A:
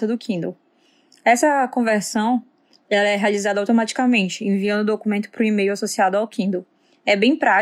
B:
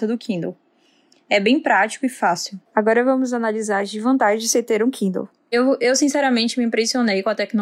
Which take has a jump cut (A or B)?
B